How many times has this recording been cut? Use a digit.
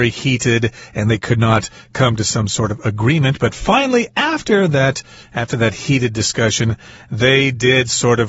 1